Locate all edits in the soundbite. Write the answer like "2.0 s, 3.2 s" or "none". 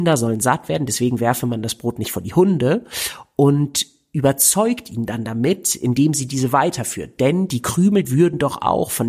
8.0 s